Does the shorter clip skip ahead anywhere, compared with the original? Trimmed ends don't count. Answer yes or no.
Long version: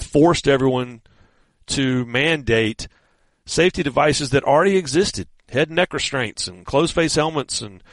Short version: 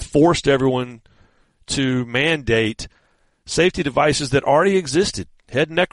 no